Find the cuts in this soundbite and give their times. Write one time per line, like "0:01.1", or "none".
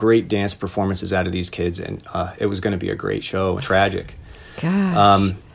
0:03.6